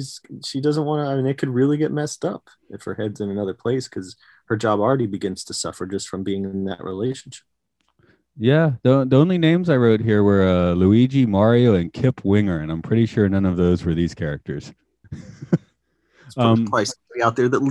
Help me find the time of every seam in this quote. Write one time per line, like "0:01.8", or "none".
0:15.0